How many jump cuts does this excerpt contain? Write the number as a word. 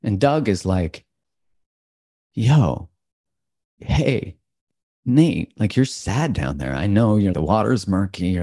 two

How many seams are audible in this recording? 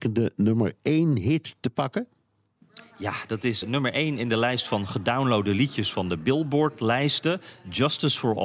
one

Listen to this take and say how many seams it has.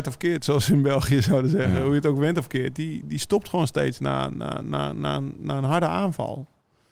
one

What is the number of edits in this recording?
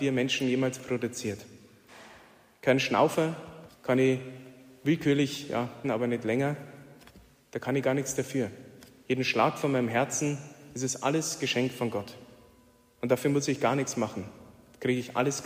two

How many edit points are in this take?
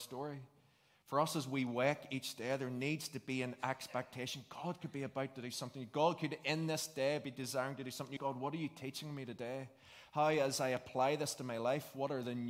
one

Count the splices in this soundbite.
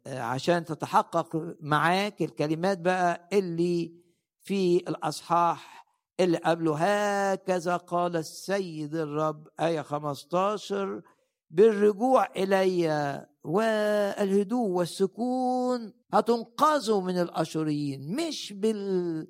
one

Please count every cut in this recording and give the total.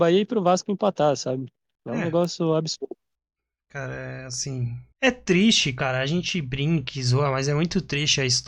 one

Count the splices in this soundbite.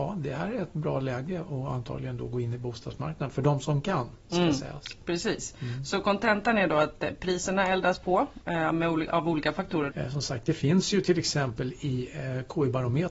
one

